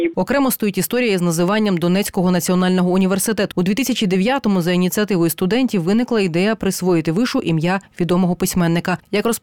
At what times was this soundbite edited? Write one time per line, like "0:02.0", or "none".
0:03.5